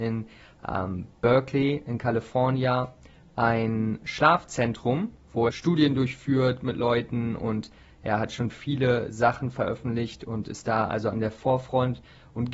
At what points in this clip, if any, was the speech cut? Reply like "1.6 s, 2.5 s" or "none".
5.5 s